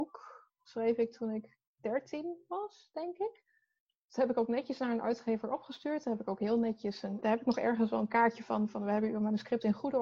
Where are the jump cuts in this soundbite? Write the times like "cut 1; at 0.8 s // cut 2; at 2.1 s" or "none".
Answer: cut 1; at 7.2 s